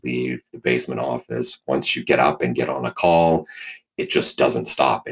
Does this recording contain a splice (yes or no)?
no